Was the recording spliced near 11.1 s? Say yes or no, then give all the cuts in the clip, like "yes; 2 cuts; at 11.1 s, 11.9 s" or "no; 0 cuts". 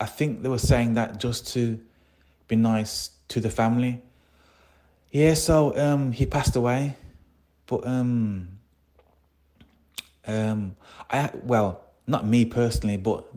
no; 0 cuts